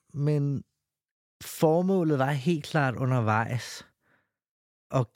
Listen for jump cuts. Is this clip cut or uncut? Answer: uncut